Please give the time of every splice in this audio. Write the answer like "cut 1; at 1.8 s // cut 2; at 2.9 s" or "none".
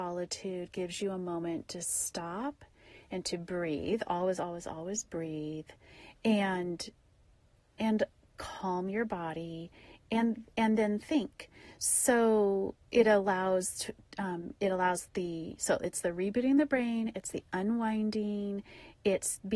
none